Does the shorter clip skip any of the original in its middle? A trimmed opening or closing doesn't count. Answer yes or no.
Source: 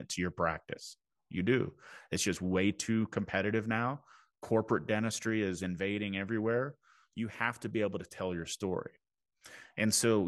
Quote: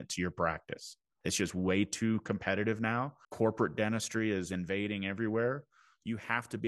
yes